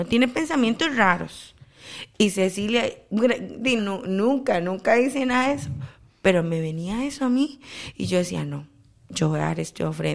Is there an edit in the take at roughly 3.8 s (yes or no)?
yes